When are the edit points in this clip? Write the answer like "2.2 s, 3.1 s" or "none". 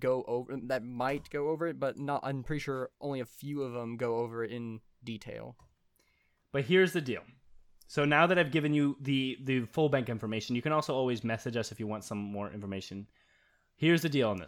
none